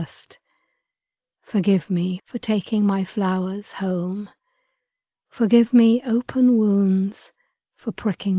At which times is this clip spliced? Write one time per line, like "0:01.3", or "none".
0:02.2